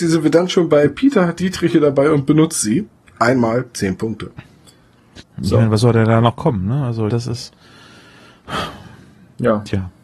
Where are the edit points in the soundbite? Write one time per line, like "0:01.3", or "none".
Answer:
0:05.2
0:07.1